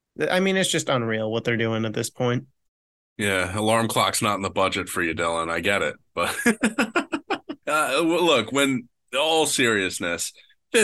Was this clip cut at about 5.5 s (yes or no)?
no